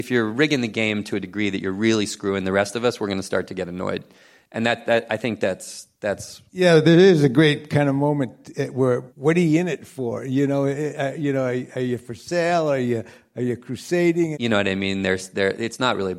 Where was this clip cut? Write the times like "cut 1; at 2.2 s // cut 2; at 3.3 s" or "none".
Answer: cut 1; at 9.1 s // cut 2; at 14.3 s